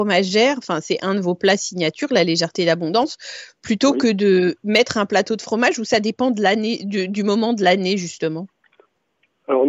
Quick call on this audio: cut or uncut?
uncut